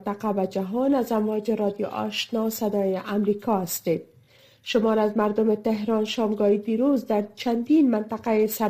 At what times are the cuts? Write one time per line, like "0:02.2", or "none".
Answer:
none